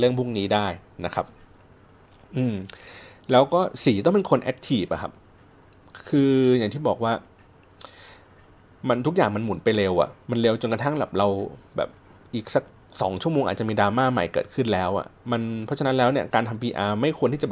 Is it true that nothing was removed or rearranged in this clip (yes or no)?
yes